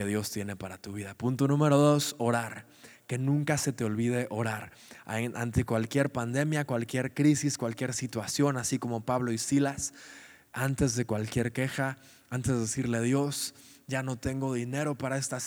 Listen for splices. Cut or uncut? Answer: uncut